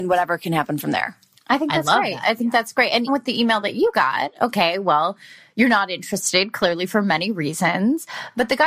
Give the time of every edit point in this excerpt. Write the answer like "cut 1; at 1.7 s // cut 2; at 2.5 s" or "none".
cut 1; at 3.1 s